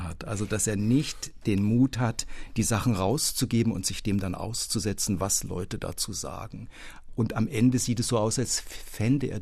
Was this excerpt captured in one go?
yes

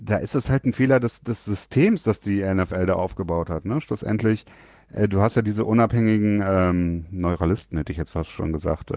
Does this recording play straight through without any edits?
yes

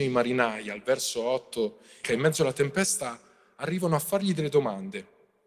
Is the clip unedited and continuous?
no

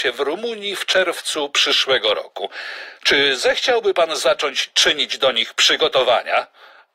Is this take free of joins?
yes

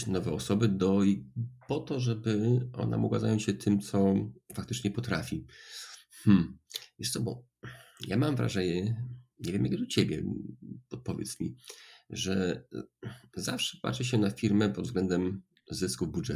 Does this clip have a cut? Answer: no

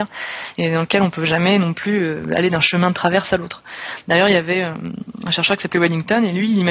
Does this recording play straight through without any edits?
yes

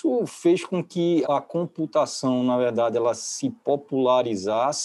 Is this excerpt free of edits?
no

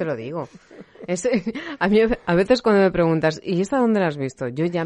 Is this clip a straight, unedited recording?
yes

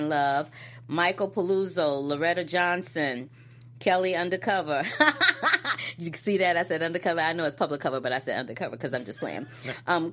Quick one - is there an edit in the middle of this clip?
no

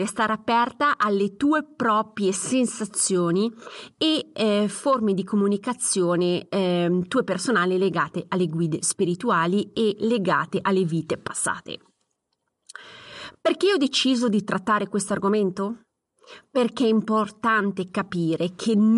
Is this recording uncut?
yes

